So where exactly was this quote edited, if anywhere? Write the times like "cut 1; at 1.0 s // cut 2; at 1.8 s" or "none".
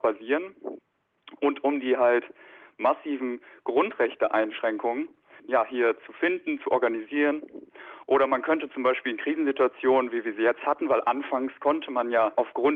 cut 1; at 5.4 s // cut 2; at 8.0 s